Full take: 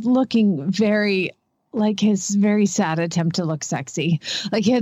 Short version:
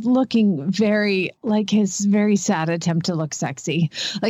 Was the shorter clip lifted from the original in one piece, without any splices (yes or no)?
no